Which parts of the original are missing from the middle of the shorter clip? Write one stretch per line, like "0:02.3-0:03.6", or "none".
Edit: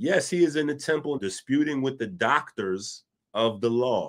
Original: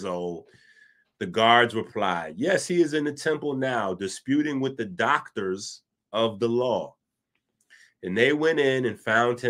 0:03.5-0:04.0